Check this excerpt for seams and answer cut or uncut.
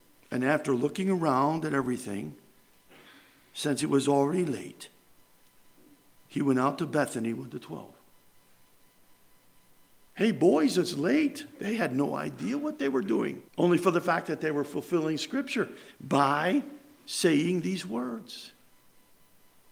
cut